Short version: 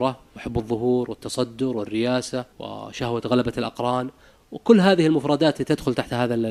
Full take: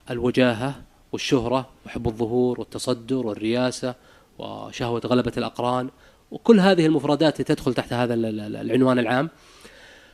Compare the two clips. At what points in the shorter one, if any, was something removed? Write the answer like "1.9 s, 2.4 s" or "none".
2.5 s